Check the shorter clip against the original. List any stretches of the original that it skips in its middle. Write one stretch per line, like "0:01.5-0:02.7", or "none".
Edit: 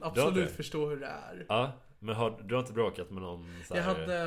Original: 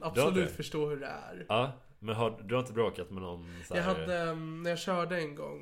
none